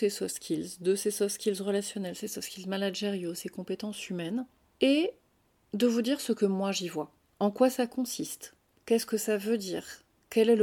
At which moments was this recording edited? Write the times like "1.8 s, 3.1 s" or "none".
none

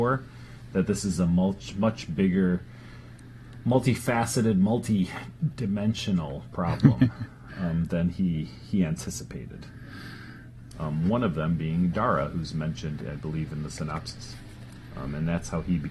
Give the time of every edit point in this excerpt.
10.7 s

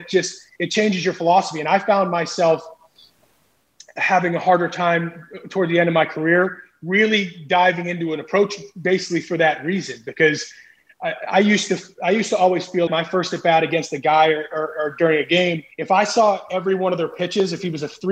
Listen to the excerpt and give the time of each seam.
12.9 s, 15.7 s

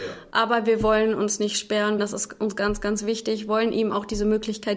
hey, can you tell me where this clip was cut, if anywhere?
2.0 s

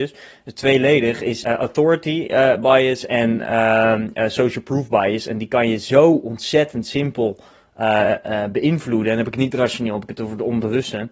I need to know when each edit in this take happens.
1.4 s

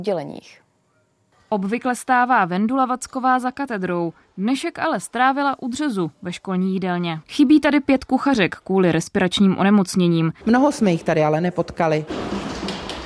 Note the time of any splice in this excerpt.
7.2 s, 10.4 s

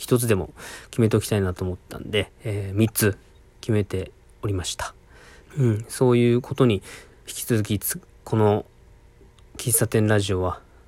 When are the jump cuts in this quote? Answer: 5.4 s, 7.3 s

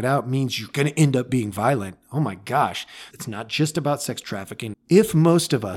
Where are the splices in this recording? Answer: 3.1 s, 4.7 s

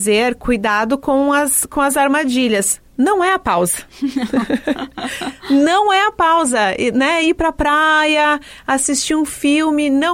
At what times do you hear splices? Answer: none

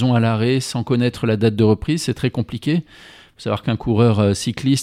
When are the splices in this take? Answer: none

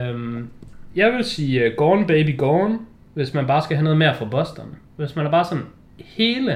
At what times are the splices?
none

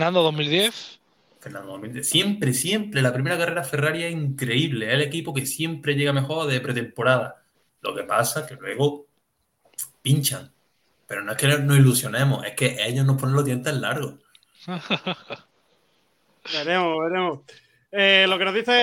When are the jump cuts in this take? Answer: none

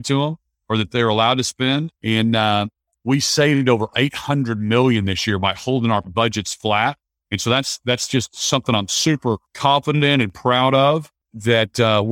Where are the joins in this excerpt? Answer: 2.0 s

